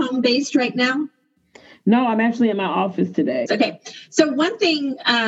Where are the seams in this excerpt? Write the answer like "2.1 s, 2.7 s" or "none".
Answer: 3.5 s